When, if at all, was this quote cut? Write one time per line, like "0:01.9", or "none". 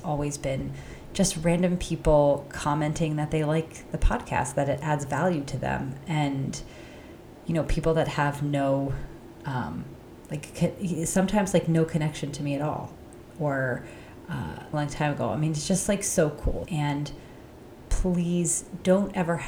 0:14.7
0:16.7

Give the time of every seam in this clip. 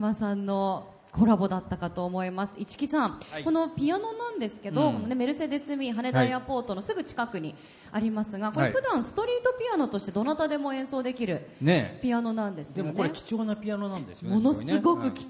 none

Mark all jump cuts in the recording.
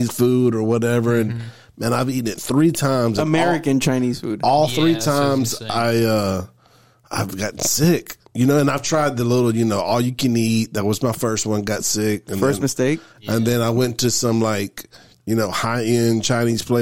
none

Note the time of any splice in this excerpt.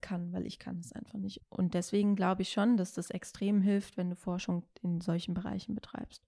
0:01.4

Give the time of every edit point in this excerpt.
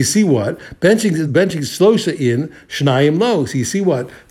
0:01.3

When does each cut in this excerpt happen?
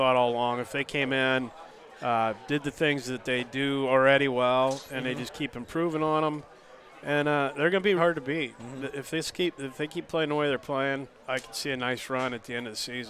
0:08.0
0:11.2

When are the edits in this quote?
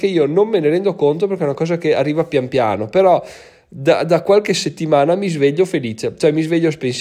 none

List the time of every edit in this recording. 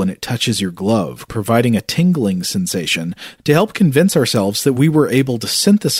0:01.3
0:03.4

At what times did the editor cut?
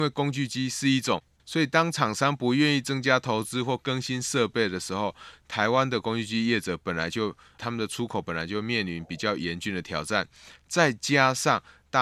0:01.4

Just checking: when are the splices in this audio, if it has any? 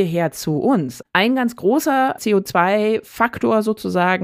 0:01.0
0:02.2

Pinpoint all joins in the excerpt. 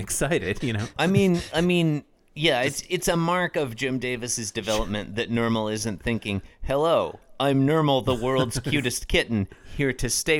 none

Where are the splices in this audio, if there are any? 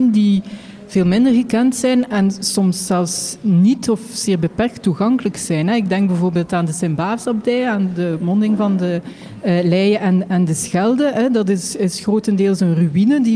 none

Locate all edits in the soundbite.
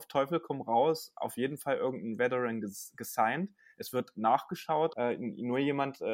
0:04.9

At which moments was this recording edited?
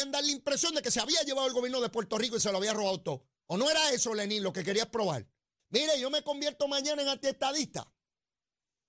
0:03.4
0:05.6

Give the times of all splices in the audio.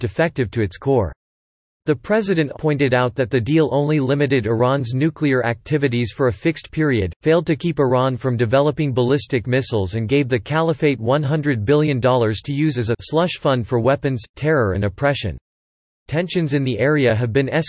0:02.5
0:16.0

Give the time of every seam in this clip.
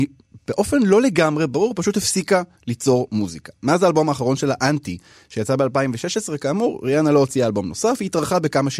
none

